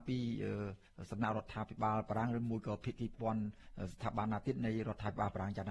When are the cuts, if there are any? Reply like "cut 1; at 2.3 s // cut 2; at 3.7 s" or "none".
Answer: cut 1; at 3.1 s